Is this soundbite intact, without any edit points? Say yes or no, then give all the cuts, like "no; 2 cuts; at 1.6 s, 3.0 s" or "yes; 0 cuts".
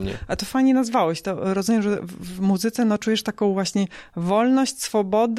yes; 0 cuts